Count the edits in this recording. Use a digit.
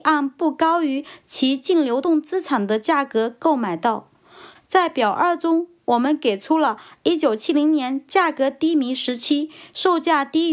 1